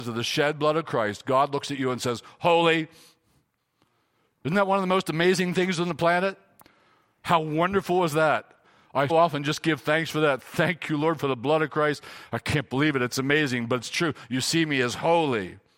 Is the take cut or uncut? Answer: cut